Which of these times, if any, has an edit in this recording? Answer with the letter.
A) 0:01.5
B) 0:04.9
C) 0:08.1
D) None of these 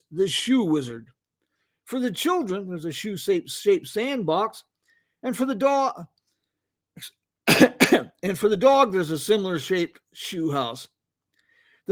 D